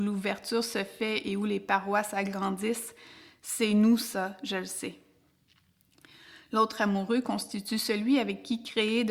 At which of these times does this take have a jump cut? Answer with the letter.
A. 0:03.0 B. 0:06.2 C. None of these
C